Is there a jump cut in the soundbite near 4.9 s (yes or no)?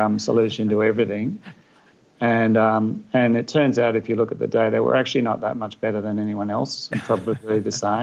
no